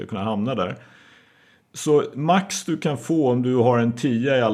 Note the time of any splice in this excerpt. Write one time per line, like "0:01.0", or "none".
none